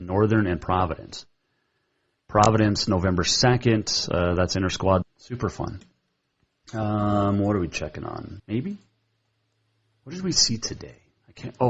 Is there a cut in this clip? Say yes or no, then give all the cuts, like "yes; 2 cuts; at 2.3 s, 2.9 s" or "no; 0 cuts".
yes; 3 cuts; at 2.2 s, 5.0 s, 8.4 s